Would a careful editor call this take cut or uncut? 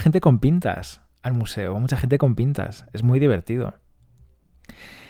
uncut